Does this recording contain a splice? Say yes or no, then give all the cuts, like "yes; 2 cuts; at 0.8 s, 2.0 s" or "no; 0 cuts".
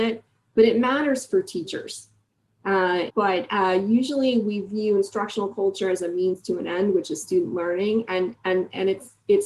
yes; 1 cut; at 3.1 s